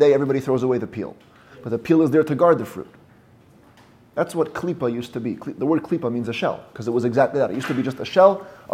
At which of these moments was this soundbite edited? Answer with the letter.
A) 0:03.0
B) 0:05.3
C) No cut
C